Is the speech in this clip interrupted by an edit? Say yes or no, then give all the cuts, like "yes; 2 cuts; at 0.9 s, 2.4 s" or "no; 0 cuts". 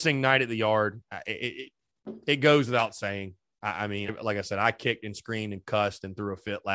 yes; 1 cut; at 4.1 s